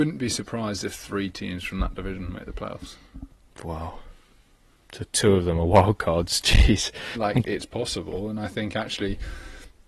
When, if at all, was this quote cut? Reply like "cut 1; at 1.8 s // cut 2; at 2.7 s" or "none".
cut 1; at 7.1 s

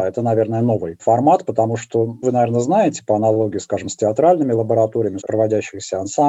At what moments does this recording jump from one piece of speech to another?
cut 1; at 2.2 s // cut 2; at 5.2 s

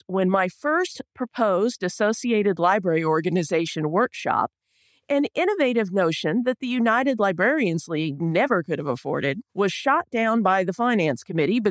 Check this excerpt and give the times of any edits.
cut 1; at 9.5 s

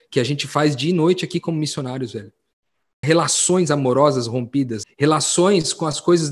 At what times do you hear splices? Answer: cut 1; at 3.0 s // cut 2; at 4.8 s

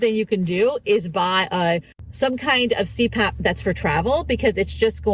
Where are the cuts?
none

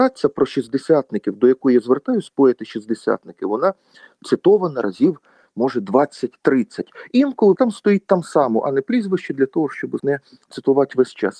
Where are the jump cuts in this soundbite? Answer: cut 1; at 7.6 s // cut 2; at 10.0 s

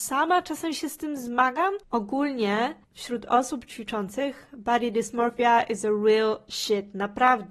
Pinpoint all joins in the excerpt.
none

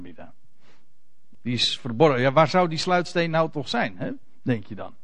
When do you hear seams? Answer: cut 1; at 1.3 s

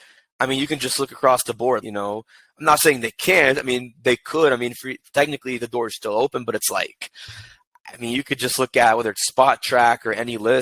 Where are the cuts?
cut 1; at 1.8 s

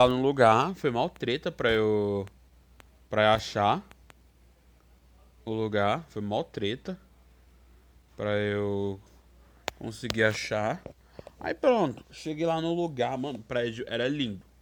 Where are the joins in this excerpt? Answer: none

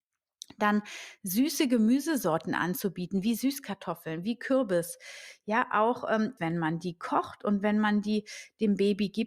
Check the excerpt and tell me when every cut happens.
cut 1; at 6.4 s

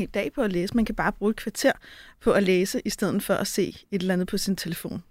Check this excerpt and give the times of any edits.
none

